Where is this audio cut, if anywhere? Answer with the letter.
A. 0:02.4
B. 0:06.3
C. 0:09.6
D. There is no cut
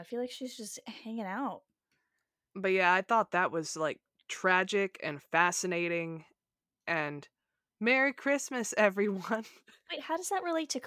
D